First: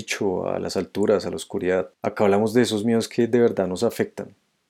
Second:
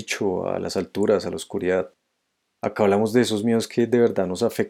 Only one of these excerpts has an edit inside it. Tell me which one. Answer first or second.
first